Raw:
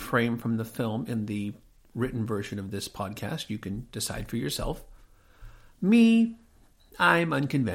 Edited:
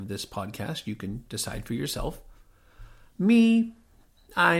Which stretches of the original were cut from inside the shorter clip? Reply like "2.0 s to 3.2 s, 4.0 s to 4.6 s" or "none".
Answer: none